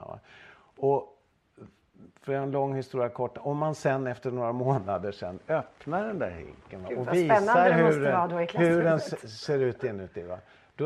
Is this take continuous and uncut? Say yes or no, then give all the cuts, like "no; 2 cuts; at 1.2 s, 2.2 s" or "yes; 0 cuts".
yes; 0 cuts